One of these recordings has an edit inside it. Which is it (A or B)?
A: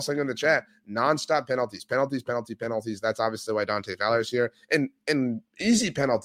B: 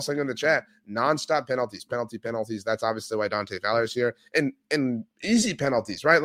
B